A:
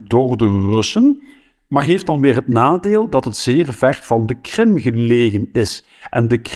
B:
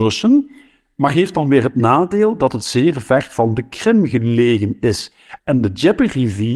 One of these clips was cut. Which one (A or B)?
B